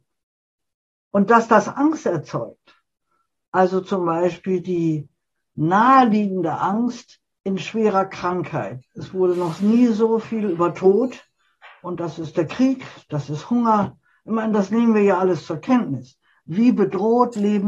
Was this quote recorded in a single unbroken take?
no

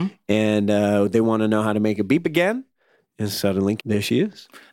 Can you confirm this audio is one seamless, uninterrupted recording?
no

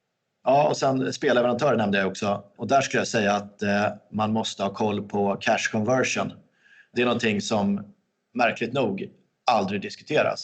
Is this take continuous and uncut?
yes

